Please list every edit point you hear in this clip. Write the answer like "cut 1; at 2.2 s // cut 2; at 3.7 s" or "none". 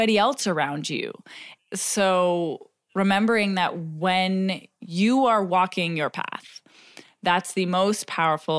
cut 1; at 1.6 s